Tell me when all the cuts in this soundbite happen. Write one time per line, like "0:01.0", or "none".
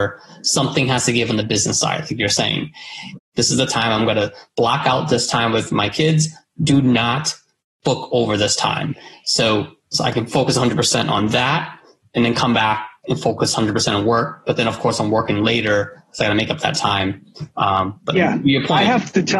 0:03.2